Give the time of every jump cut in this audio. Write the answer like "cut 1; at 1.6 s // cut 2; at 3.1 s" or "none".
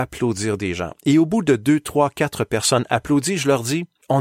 none